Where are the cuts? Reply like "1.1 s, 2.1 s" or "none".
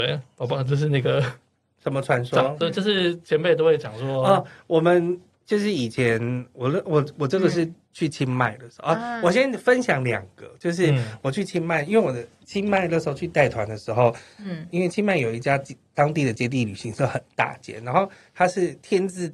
none